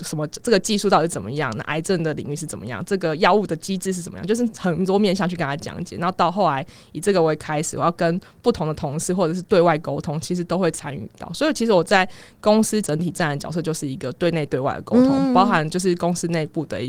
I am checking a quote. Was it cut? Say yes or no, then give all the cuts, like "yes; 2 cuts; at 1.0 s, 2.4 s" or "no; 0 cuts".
no; 0 cuts